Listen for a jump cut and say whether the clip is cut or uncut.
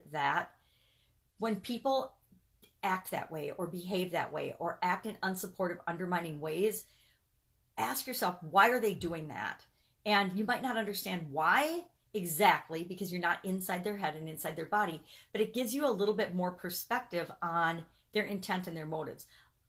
uncut